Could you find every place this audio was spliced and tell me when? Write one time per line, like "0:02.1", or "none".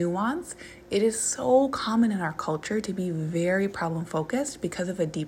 none

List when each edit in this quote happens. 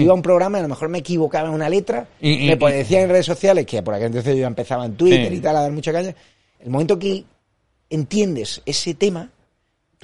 0:06.5

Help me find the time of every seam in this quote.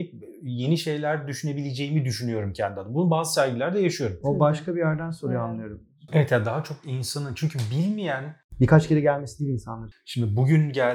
0:04.2
0:06.1
0:09.9

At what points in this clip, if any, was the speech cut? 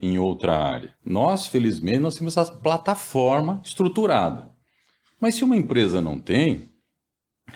0:01.0

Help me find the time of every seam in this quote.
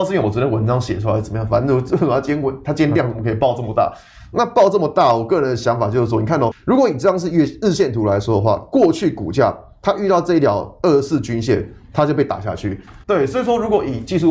0:06.5
0:13.0

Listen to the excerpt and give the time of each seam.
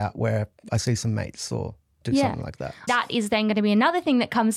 0:02.9

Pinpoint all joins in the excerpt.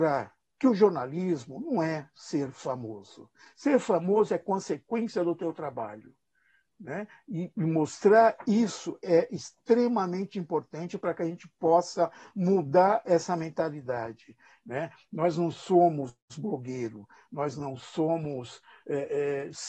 none

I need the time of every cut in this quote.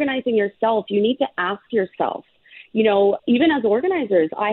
0:03.2

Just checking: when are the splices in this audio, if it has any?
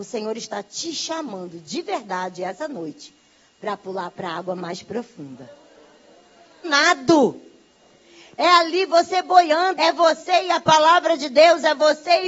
0:06.6
0:09.7

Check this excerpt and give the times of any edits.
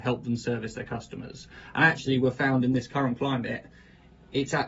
none

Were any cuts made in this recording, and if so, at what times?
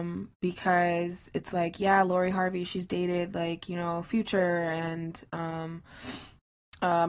none

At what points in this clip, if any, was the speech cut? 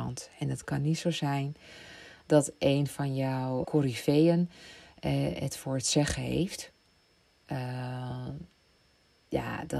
0:03.6

